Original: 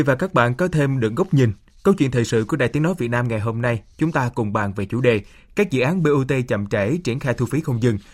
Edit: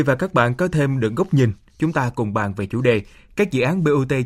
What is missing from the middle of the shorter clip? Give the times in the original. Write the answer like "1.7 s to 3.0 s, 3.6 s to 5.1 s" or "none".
1.7 s to 3.9 s